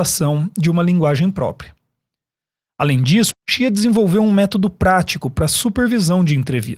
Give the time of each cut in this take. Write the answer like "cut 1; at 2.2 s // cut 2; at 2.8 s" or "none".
cut 1; at 3.3 s